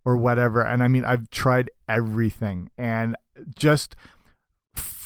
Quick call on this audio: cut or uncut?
uncut